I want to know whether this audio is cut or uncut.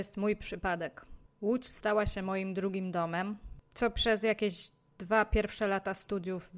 uncut